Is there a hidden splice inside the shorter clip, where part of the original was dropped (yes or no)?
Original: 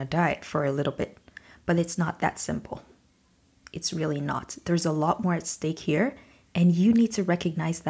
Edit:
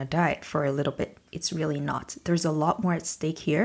yes